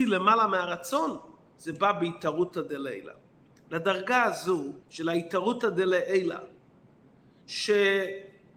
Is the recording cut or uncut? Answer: cut